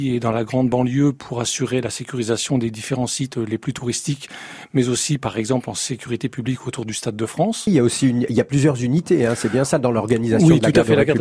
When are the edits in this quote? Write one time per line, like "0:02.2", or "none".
0:07.7